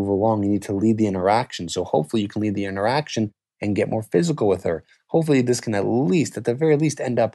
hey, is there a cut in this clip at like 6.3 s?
no; 0 cuts

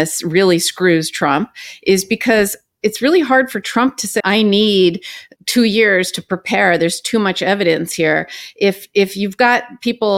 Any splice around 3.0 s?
no; 2 cuts; at 4.2 s, 5.4 s

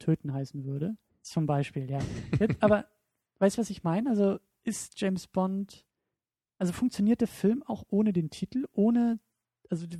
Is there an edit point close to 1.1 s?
yes; 1 cut; at 1.1 s

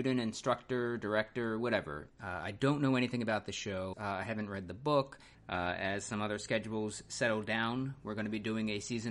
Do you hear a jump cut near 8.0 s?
no; 3 cuts; at 2.1 s, 3.9 s, 5.3 s

